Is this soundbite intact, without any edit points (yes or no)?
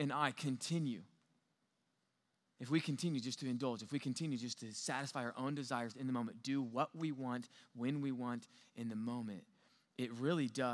yes